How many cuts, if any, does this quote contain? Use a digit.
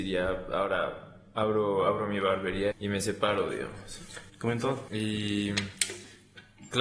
2